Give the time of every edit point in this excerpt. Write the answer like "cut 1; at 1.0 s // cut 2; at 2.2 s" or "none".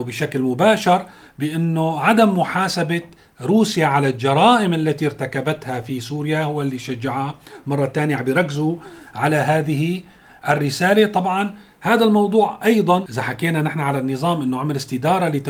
none